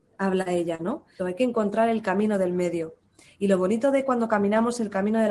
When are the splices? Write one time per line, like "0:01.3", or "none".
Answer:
0:01.2